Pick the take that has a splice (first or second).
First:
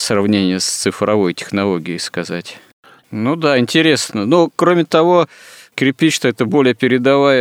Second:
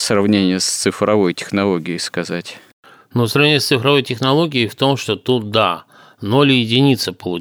first